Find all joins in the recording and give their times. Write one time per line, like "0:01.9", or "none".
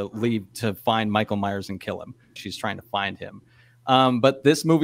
0:02.4